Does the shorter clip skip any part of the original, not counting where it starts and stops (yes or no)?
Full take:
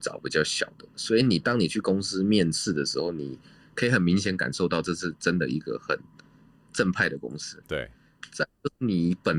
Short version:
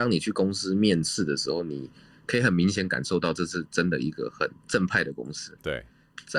yes